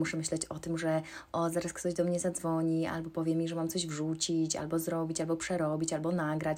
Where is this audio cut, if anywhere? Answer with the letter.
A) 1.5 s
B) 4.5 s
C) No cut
C